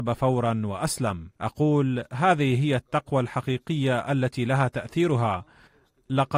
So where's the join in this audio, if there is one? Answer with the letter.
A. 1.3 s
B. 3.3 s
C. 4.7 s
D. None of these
A